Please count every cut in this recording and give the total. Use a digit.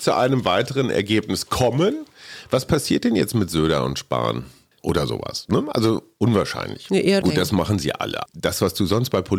2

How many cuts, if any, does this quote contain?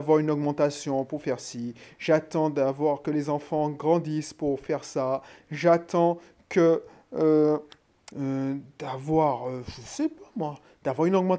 1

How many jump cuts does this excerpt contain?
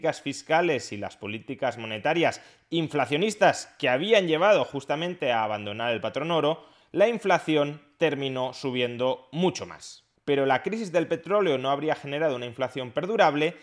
1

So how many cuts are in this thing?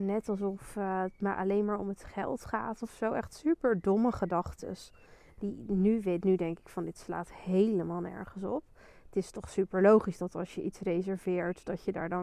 0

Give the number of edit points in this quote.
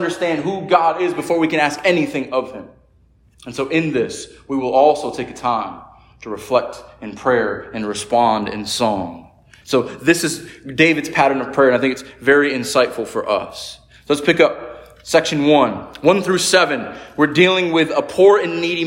1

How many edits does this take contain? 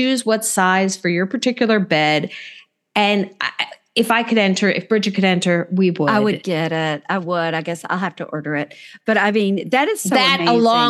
0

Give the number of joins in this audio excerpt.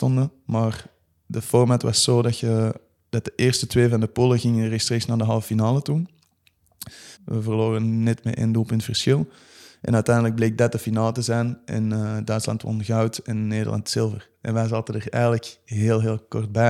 1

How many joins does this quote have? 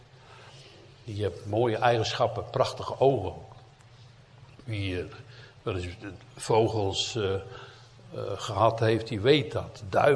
0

